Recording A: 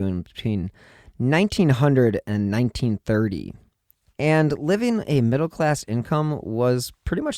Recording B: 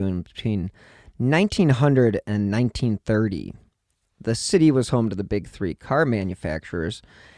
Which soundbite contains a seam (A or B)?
A